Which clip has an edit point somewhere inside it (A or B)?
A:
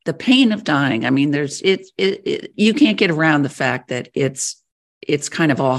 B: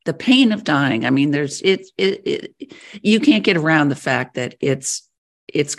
A